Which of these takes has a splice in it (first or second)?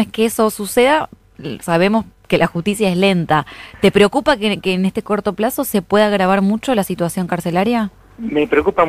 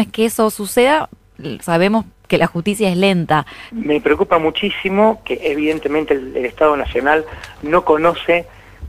second